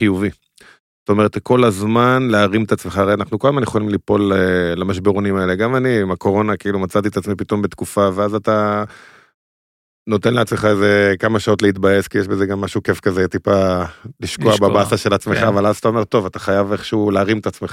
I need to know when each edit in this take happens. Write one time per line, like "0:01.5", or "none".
none